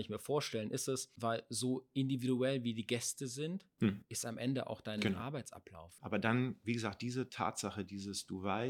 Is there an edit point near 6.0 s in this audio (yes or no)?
yes